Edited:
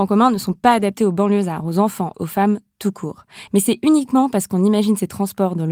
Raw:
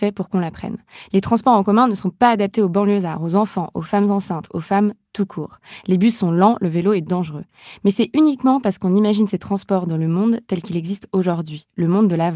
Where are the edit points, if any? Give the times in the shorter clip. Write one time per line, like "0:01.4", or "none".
0:02.1
0:03.5